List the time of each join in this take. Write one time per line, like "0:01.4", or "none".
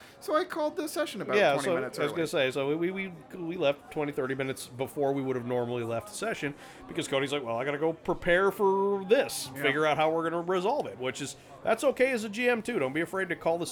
none